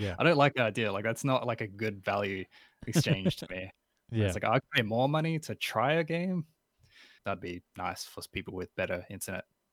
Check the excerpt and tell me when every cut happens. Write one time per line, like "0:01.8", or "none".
0:07.2